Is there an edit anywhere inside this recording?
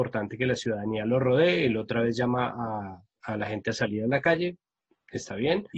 no; 0 cuts

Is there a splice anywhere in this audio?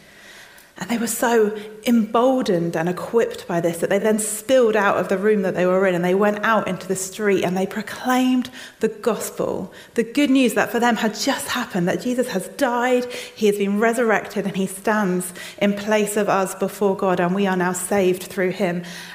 no; 0 cuts

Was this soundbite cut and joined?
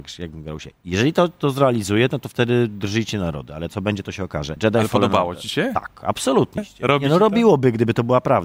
yes; 2 cuts; at 4.6 s, 6.6 s

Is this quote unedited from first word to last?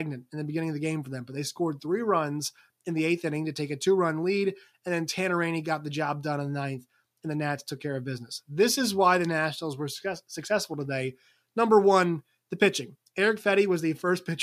yes; 0 cuts

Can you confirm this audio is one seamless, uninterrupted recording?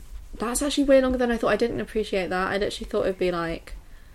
yes; 0 cuts

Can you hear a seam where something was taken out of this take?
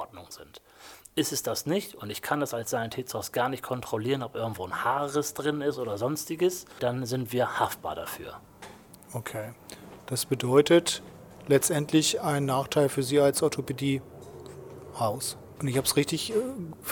yes; 1 cut; at 15.6 s

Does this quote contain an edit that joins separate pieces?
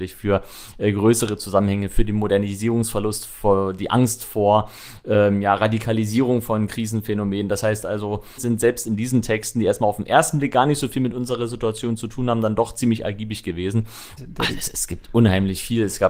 yes; 2 cuts; at 8.4 s, 14.2 s

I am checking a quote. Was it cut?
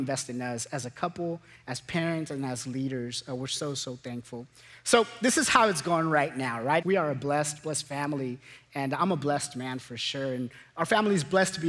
yes; 1 cut; at 6.8 s

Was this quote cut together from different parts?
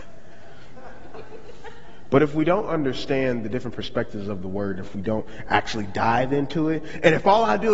no; 0 cuts

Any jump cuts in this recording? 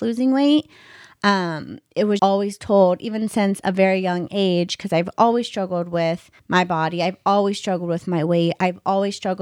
yes; 2 cuts; at 2.2 s, 6.4 s

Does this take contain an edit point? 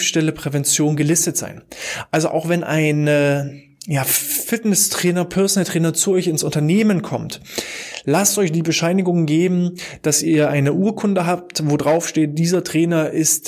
no; 0 cuts

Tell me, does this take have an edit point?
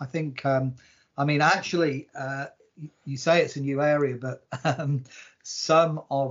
no; 0 cuts

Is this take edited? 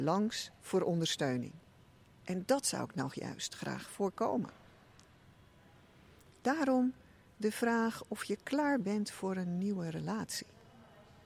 no; 0 cuts

